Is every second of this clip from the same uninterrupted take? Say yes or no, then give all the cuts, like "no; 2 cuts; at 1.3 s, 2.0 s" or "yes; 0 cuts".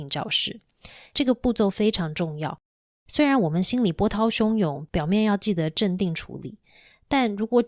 yes; 0 cuts